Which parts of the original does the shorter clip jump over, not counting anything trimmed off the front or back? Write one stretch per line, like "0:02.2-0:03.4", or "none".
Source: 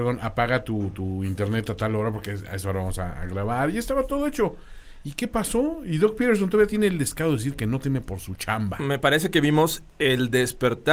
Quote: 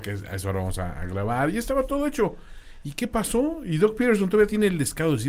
none